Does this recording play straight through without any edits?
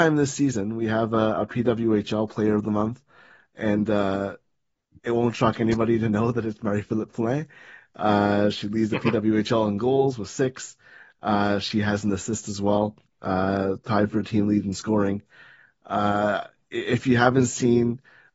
yes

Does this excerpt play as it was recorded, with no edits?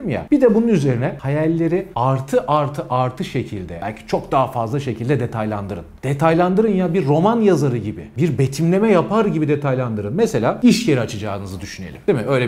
yes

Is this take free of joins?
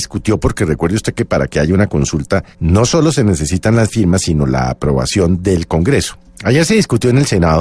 no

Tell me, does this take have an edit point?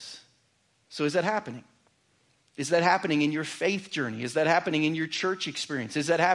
no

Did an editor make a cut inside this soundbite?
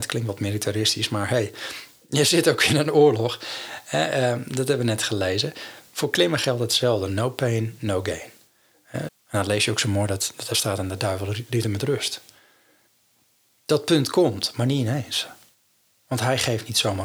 yes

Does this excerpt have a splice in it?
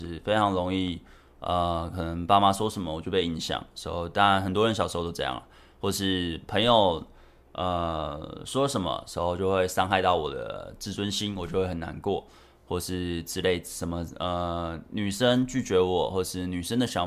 no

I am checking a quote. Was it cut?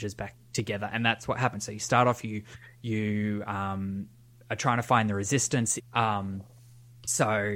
yes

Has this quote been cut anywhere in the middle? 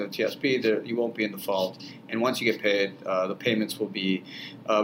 no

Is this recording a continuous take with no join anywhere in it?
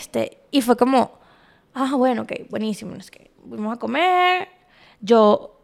yes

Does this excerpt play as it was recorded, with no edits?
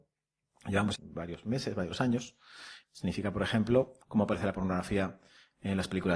no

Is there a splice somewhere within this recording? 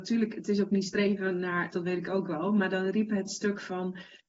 yes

